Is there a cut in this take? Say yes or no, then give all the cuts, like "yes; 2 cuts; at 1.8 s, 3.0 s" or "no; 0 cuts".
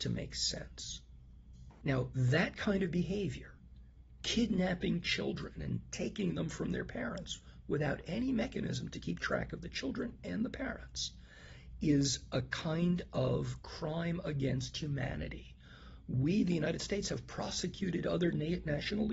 yes; 1 cut; at 1.8 s